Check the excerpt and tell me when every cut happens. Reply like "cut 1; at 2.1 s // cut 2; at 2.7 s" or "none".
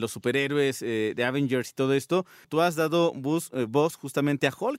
cut 1; at 2.4 s